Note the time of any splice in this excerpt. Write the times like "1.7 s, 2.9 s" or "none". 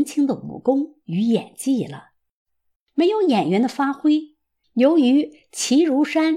2.8 s, 4.6 s